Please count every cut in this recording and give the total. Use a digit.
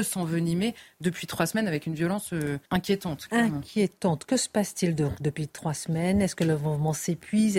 1